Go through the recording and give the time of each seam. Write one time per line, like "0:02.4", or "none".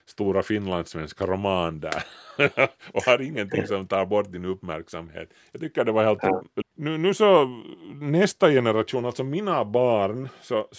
0:06.6